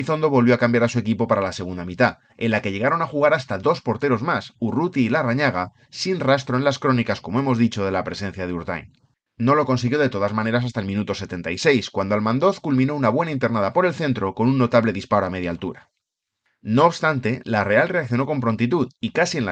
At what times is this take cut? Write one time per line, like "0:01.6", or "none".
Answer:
0:09.3